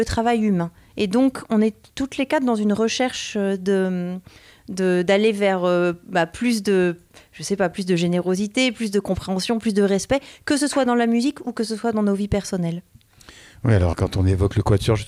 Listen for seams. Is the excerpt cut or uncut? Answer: cut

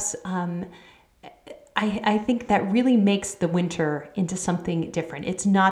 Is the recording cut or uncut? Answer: cut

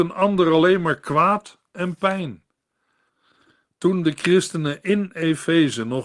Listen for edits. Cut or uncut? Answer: cut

